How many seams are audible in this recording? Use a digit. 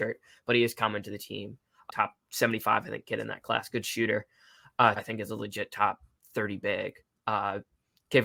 2